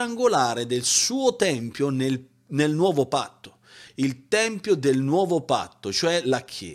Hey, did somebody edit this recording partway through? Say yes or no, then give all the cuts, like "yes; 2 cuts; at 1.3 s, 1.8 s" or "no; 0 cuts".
no; 0 cuts